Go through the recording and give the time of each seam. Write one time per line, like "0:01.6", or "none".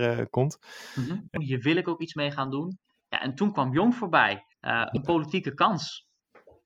0:01.4
0:04.5